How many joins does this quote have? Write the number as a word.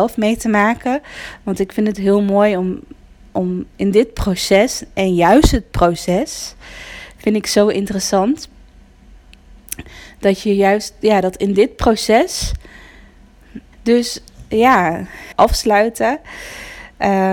two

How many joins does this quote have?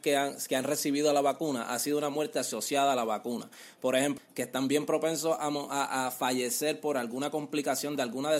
one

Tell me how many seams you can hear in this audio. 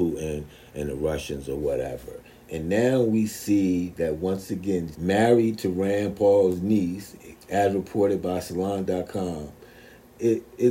two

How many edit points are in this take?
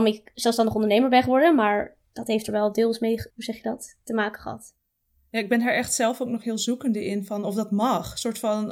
one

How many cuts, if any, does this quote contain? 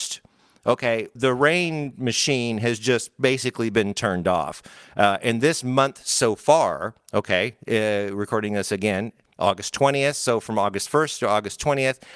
one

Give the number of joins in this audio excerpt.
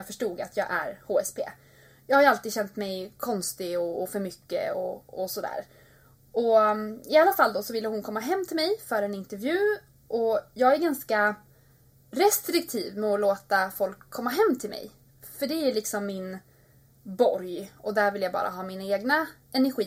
zero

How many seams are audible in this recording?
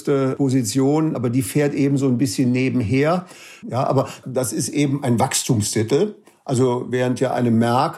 one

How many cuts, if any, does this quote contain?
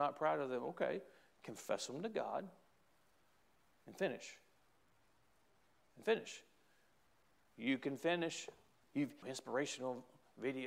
two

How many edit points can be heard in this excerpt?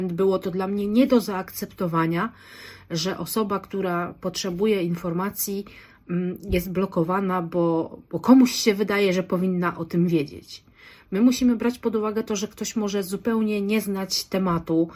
zero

